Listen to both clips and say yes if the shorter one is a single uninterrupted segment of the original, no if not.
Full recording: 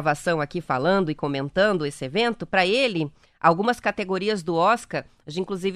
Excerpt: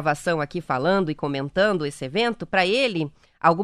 yes